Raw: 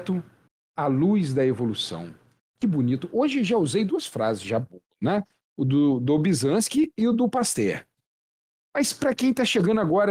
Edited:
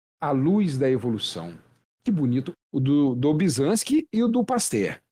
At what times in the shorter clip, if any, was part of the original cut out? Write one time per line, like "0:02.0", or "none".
0:02.5